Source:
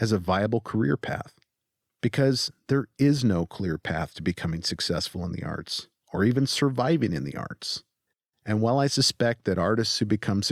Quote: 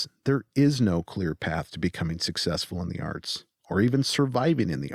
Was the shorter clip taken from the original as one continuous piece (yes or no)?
yes